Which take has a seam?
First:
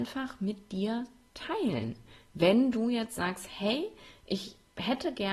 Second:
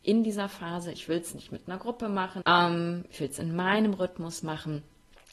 second; 2 cuts; at 0.9 s, 2.4 s

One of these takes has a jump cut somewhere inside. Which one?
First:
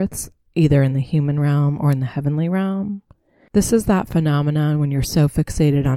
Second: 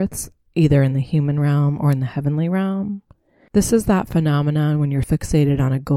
second; 1 cut; at 5.0 s

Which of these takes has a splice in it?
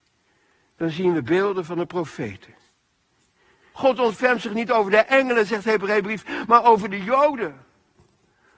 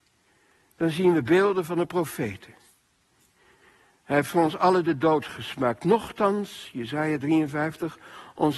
first; 1 cut; at 3.7 s

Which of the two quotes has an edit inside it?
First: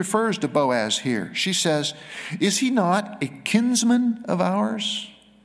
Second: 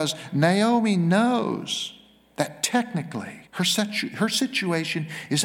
second; 1 cut; at 3.5 s

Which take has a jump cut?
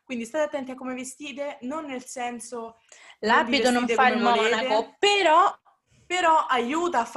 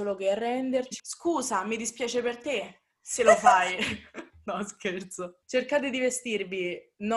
second; 1 cut; at 1.0 s

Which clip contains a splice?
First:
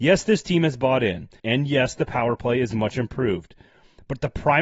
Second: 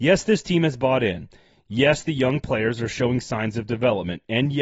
first; 1 cut; at 1.4 s

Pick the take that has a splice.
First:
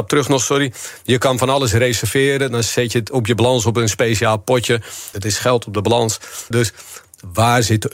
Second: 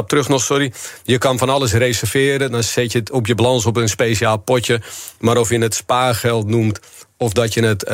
first; 2 cuts; at 5.1 s, 6.5 s

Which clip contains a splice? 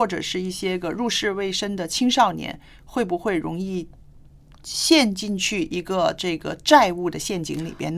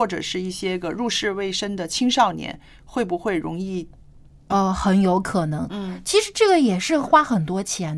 second; 2 cuts; at 4.5 s, 5.7 s

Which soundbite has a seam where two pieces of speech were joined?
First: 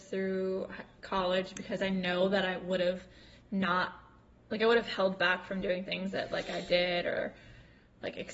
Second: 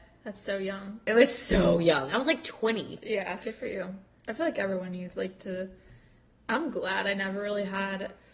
second; 1 cut; at 3.4 s

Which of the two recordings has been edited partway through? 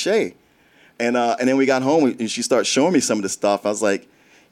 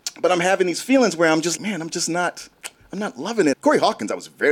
second; 2 cuts; at 1.6 s, 3.5 s

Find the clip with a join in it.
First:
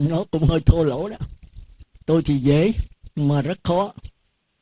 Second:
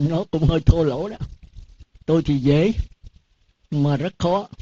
first; 1 cut; at 3.1 s

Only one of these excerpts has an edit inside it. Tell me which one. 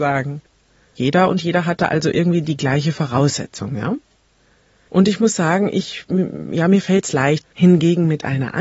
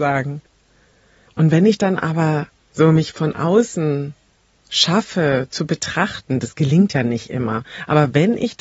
first; 2 cuts; at 1.0 s, 7.4 s

